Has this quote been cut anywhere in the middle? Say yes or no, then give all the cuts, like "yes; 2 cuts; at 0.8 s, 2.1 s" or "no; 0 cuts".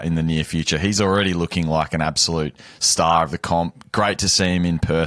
no; 0 cuts